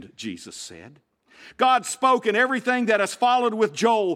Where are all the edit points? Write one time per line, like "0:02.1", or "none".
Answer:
0:01.5